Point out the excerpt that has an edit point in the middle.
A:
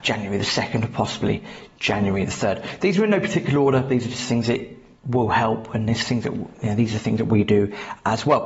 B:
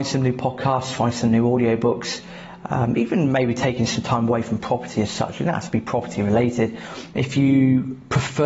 B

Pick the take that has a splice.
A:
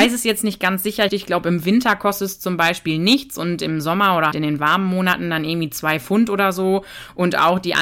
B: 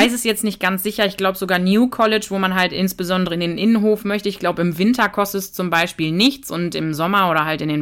A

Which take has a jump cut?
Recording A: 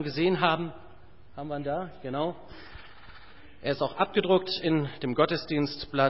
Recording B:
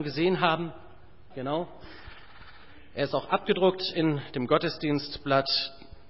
B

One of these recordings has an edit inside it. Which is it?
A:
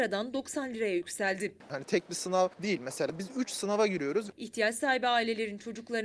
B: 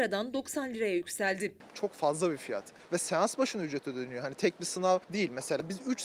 A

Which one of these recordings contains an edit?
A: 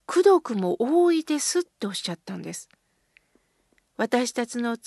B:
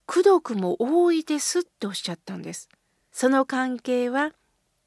B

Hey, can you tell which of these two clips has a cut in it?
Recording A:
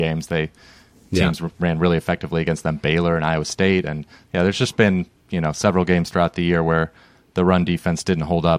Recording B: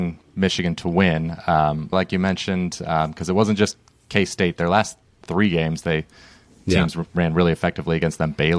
B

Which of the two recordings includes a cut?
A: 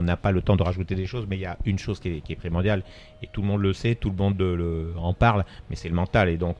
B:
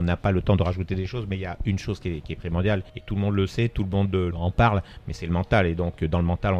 B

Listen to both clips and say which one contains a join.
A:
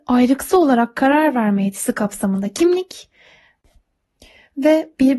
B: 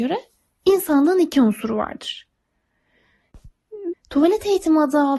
B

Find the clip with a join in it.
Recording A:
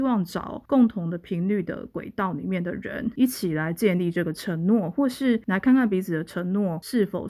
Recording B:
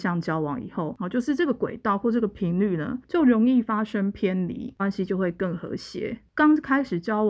B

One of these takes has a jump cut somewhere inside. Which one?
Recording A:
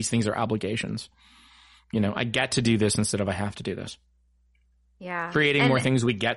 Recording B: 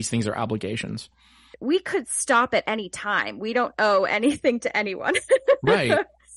B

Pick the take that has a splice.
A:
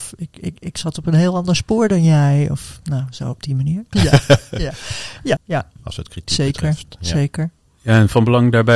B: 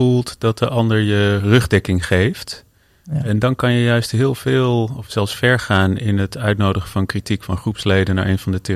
A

